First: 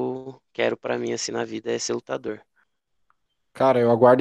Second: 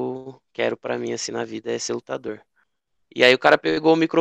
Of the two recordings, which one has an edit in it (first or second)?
second